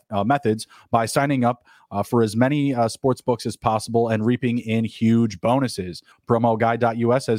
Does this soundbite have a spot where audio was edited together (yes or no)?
yes